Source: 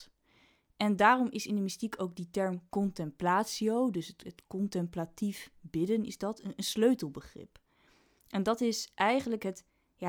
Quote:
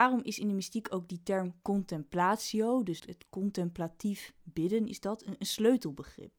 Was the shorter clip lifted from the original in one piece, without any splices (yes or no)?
no